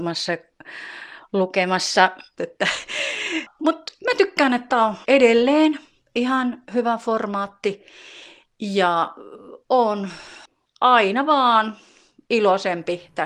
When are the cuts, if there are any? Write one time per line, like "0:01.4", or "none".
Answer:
0:02.4
0:05.0